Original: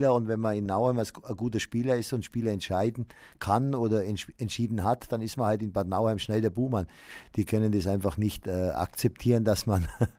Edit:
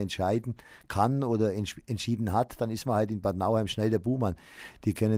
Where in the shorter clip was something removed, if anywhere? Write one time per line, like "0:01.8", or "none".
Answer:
none

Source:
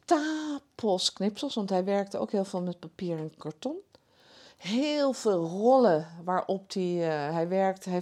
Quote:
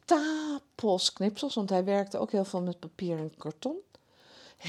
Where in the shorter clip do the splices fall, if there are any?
none

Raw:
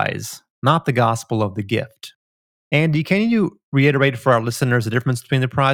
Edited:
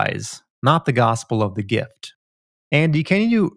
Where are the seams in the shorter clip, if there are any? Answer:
none

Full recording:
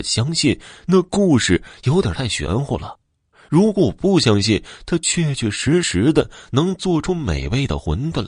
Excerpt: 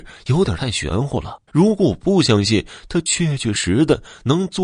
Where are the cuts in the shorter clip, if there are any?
0:01.5
0:03.5

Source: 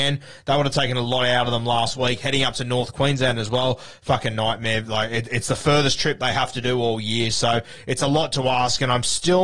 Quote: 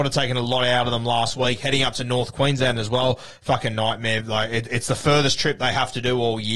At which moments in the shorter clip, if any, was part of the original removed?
none

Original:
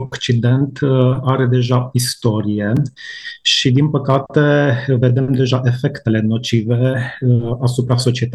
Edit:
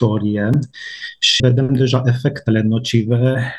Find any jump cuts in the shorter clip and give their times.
0:01.4

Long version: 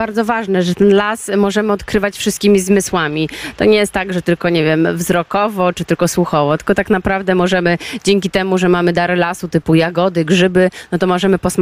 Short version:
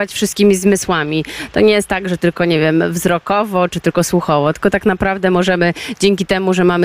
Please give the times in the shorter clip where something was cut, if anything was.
none

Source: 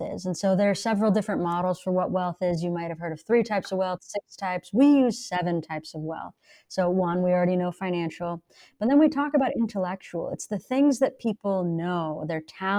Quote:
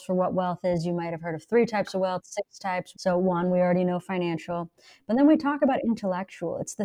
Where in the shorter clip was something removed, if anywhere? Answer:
0:02.9

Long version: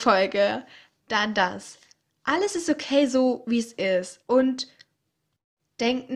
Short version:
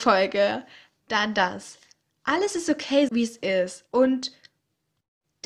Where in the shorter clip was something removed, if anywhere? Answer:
0:03.1

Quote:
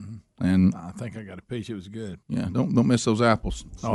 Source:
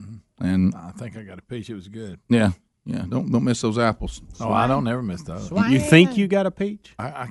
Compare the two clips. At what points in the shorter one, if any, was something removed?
0:02.2

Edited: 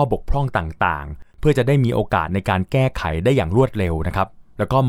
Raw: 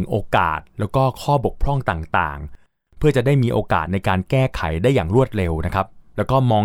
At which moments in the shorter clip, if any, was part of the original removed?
0:01.3

